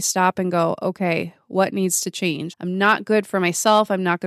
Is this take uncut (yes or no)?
no